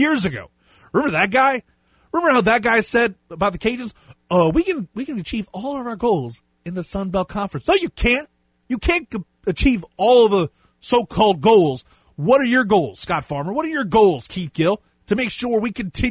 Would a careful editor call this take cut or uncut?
uncut